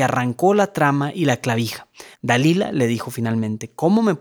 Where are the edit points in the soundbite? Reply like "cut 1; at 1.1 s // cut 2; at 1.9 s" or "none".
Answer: cut 1; at 2.1 s